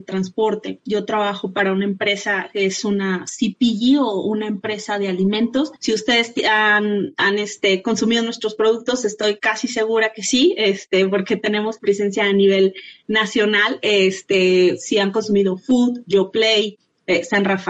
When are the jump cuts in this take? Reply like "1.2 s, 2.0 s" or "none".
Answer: 5.8 s